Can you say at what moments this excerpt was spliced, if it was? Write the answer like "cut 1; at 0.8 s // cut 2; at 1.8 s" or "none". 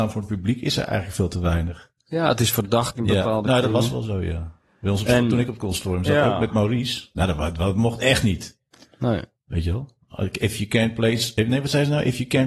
cut 1; at 2.9 s